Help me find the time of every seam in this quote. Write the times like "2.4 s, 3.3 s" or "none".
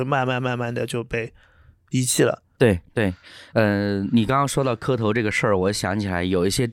2.6 s

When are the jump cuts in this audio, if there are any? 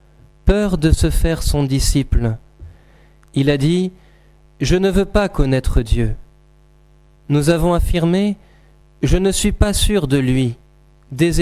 none

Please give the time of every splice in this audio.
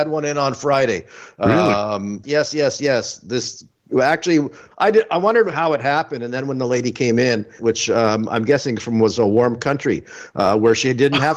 2.2 s, 4.7 s, 7.6 s

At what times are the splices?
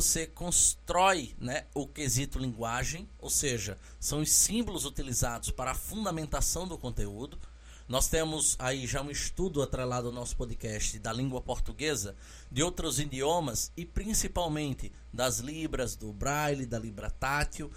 none

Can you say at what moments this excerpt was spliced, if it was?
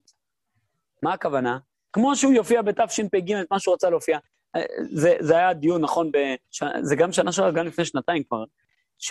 1.9 s, 6.4 s

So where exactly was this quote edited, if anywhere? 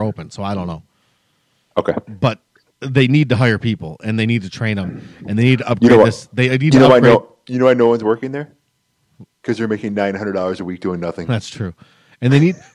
none

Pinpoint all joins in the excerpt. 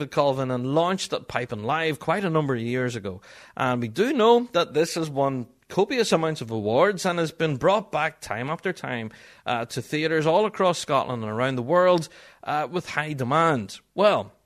none

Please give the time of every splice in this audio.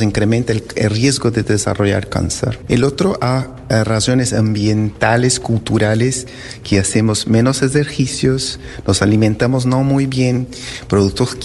2.6 s

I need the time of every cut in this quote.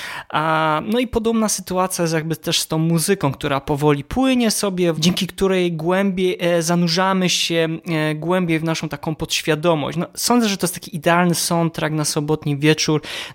4.9 s

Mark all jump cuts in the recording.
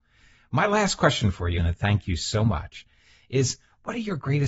1.6 s

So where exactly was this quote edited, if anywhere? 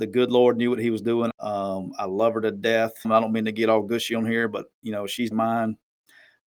1.3 s, 3.0 s, 5.3 s

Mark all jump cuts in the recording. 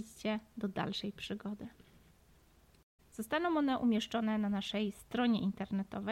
3.0 s

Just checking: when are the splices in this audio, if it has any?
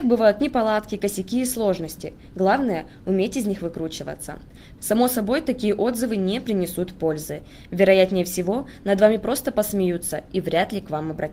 4.8 s

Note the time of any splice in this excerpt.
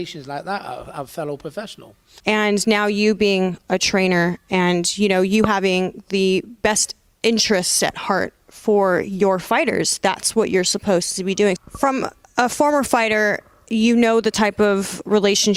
2.2 s, 11.6 s

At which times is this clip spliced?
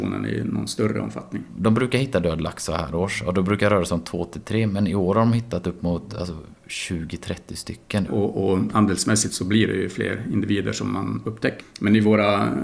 8.1 s, 11.6 s

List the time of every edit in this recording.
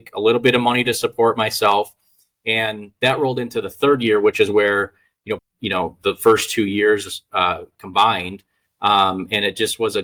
5.4 s

